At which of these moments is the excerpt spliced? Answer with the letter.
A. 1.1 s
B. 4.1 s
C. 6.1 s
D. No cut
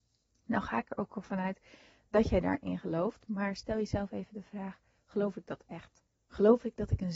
C